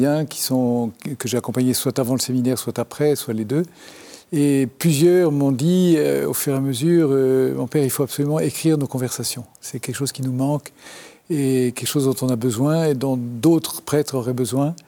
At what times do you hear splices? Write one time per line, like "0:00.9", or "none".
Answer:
none

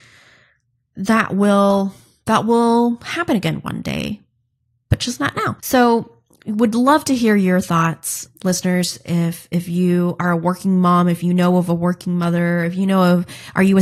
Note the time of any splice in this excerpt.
0:05.6

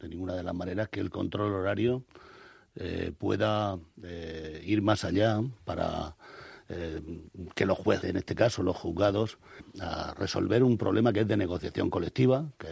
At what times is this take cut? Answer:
0:08.0
0:09.6

